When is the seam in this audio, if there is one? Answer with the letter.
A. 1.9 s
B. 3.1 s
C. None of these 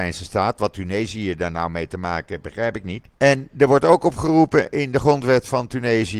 B